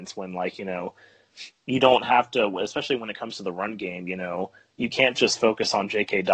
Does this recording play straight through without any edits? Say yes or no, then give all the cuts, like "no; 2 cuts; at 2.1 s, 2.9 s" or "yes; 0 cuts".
yes; 0 cuts